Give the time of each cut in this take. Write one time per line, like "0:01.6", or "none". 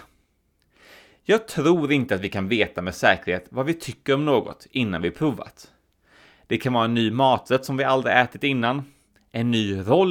none